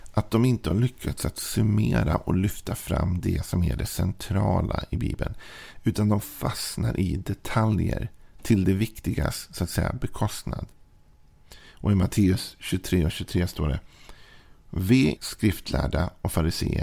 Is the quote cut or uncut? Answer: cut